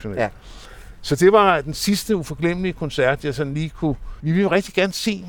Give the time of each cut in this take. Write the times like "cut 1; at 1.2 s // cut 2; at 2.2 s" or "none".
cut 1; at 4.2 s